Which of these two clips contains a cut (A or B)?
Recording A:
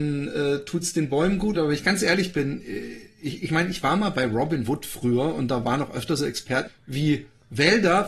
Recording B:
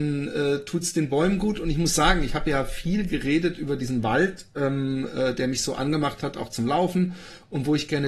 A